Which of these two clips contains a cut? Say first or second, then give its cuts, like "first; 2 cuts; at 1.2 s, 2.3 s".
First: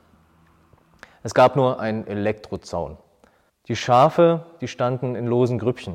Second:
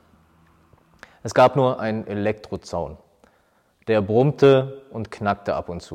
first; 1 cut; at 3.5 s